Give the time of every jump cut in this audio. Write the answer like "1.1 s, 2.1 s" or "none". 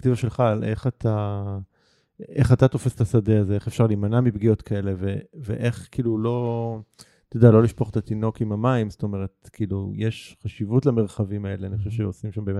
none